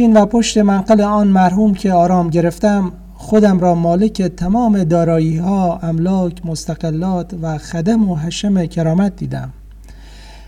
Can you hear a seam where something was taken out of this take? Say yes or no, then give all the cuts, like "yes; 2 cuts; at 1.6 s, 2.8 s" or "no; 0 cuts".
no; 0 cuts